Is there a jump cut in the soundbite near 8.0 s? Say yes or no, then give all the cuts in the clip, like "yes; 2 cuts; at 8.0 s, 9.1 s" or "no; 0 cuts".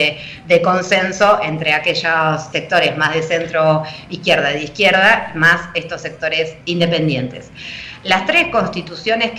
no; 2 cuts; at 2.5 s, 6.6 s